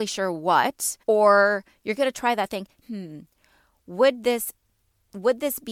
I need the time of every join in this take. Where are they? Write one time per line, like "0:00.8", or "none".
0:01.0
0:02.8